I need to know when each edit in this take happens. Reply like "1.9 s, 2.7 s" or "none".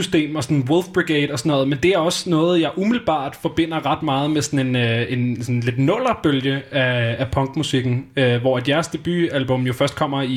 none